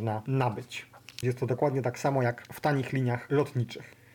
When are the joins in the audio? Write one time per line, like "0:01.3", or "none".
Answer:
0:01.2

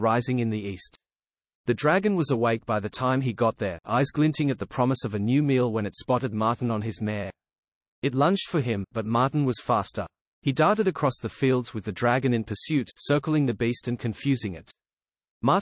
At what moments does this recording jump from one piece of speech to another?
none

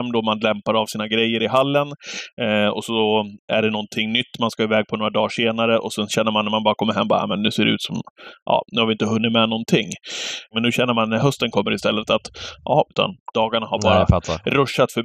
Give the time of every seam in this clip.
0:10.5
0:12.9

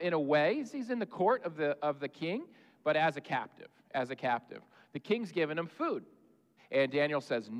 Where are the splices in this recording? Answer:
0:06.6

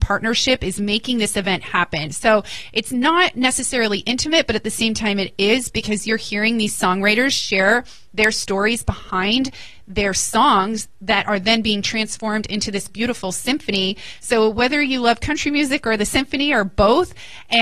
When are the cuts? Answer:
none

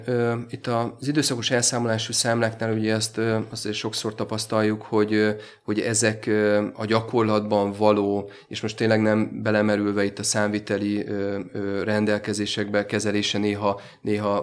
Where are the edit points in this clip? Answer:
none

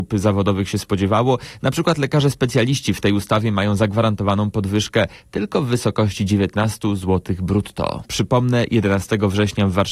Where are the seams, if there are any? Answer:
0:08.0

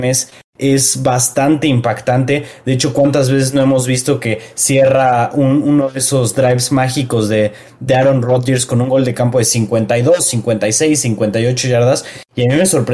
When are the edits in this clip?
none

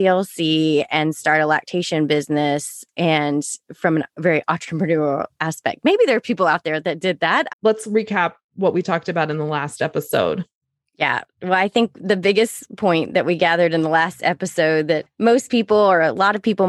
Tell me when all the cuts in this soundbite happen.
0:07.5

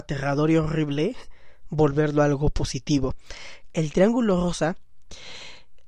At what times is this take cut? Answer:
0:03.7

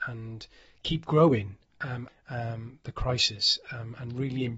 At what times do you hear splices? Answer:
0:02.1
0:03.7

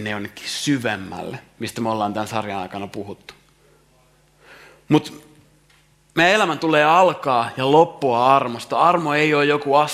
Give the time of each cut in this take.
none

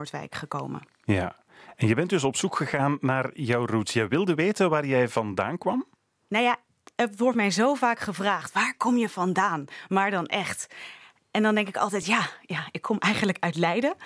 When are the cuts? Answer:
none

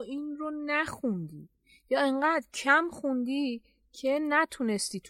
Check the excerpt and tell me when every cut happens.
none

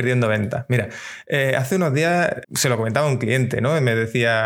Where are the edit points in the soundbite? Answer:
0:02.4

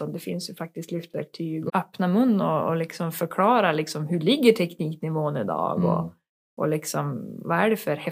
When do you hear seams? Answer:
0:01.7

